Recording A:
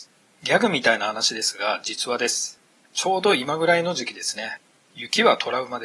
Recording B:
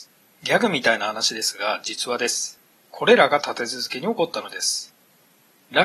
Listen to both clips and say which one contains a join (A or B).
B